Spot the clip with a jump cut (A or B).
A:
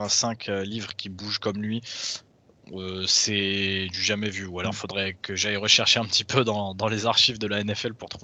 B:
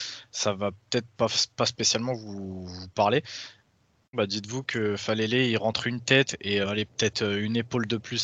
B